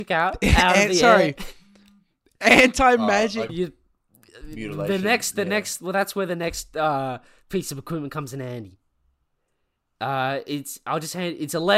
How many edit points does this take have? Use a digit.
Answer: 1